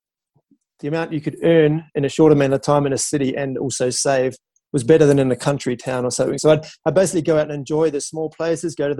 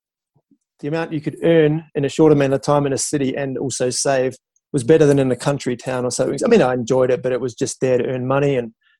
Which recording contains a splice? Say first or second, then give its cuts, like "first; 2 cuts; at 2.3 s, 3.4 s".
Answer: second; 1 cut; at 6.4 s